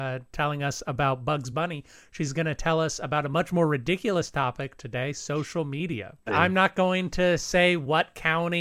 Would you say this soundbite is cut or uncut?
cut